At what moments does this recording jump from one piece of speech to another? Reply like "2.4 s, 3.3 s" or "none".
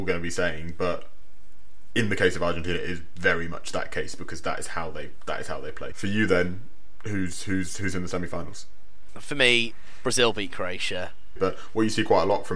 5.9 s, 11.4 s